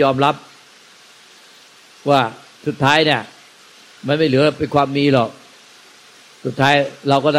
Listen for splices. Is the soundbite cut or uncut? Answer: uncut